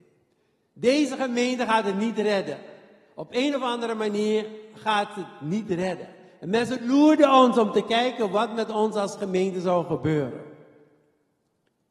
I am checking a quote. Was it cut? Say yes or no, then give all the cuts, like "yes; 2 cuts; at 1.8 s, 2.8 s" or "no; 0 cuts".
no; 0 cuts